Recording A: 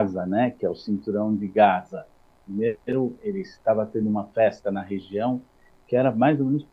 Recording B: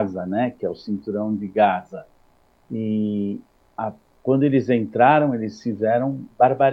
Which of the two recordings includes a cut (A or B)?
A